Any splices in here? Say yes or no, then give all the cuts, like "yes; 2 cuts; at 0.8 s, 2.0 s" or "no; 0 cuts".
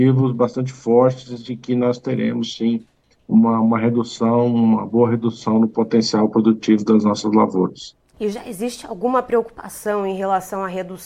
yes; 1 cut; at 8.1 s